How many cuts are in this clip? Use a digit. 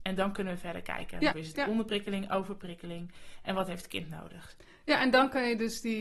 1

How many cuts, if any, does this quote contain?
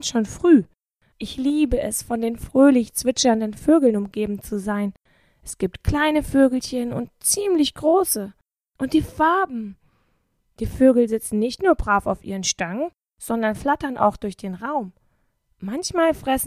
1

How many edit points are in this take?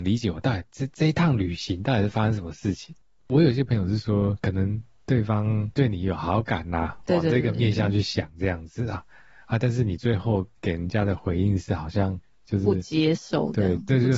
0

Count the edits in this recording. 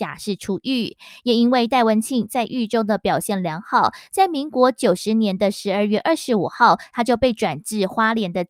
0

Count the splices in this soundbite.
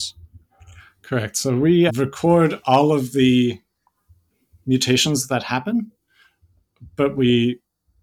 1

